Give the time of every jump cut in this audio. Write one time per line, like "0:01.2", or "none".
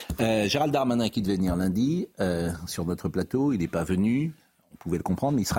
none